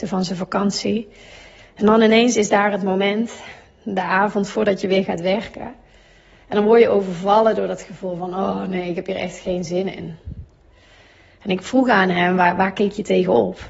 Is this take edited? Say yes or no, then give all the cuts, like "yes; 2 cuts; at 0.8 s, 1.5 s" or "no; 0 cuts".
no; 0 cuts